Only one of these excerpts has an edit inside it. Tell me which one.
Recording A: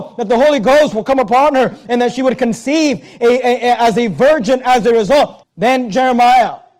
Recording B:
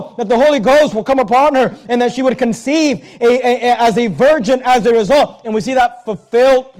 A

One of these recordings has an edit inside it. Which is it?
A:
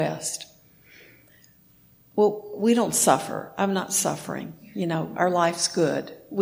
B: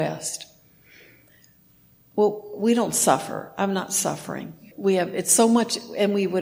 B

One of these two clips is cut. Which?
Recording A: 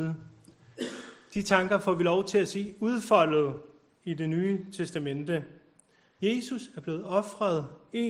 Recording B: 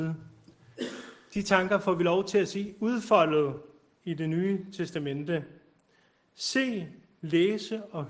A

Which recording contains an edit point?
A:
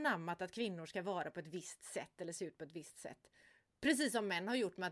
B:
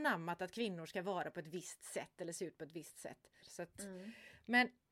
B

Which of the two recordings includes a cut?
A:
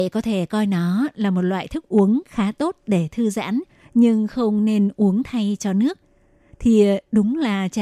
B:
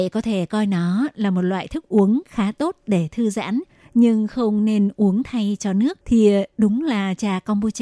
B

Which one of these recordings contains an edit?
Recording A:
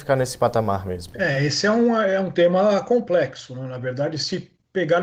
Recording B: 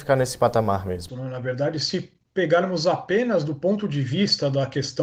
B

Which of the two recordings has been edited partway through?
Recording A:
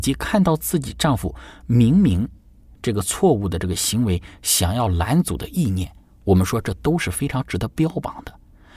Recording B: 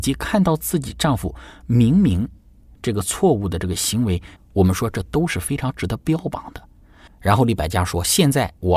B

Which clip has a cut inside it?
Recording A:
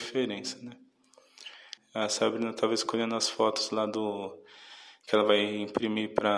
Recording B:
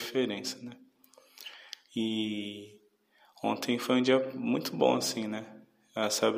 A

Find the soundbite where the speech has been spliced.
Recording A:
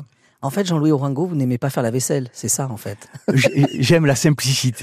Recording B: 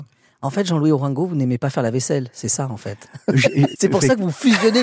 B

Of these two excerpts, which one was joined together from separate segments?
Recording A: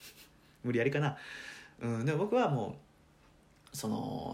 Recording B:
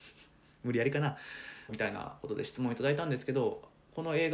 B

